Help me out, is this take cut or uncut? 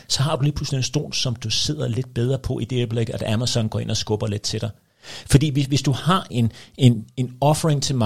cut